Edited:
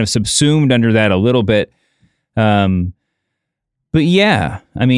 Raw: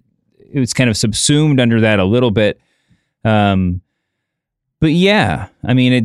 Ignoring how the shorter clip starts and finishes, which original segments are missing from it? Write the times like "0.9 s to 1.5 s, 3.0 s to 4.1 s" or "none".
none

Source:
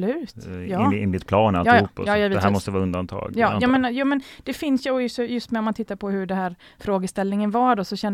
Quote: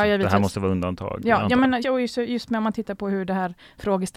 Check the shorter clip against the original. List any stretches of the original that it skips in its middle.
3.9 s to 4.8 s

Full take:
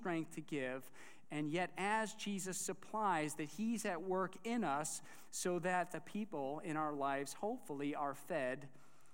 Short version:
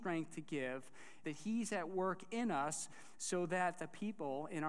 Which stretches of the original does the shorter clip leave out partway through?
1.2 s to 3.4 s

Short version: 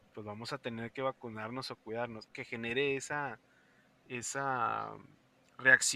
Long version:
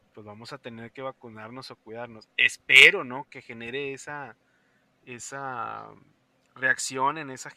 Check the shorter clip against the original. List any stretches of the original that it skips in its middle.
2.3 s to 3.3 s

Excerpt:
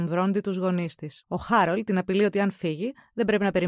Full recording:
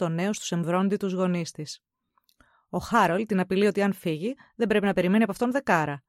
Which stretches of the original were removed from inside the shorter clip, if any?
1.8 s to 2.7 s

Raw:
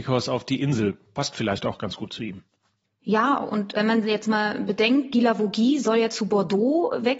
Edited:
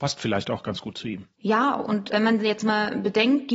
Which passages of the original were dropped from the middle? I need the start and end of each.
2.5 s to 3.0 s

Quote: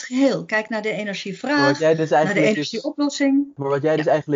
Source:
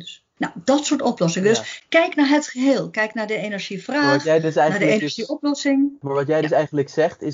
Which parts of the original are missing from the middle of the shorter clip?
none

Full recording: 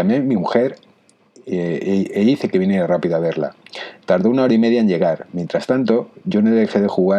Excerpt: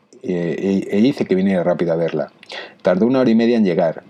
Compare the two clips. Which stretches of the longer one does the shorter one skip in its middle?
none

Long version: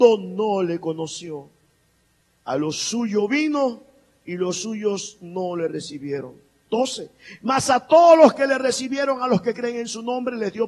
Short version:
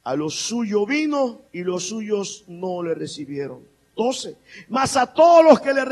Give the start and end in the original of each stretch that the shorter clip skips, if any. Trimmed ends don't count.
3.9 s to 4.2 s

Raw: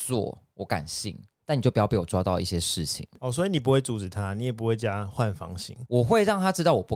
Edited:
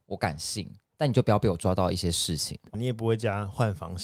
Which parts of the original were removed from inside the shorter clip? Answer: 3.2 s to 4.3 s

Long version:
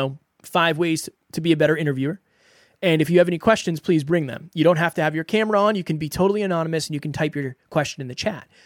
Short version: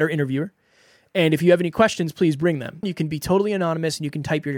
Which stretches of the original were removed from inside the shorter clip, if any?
4.5 s to 5.7 s

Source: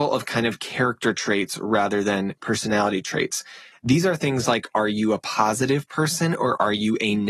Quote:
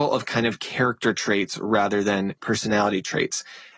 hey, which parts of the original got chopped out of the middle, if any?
none

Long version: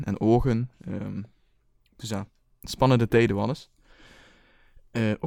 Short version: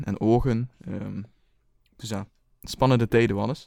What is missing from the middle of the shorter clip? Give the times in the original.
none

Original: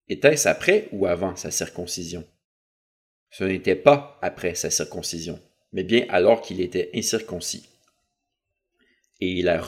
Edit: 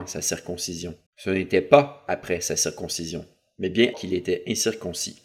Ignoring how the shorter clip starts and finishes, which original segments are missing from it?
2.4 s to 3.2 s, 6.1 s to 6.4 s

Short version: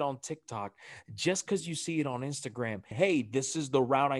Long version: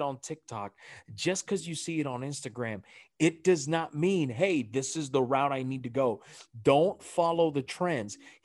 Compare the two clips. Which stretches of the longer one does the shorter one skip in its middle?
2.9 s to 4.3 s

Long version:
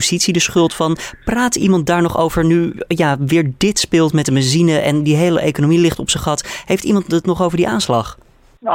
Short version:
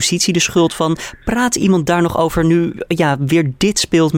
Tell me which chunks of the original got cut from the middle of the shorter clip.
none

